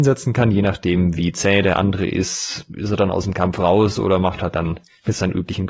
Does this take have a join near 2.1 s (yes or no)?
no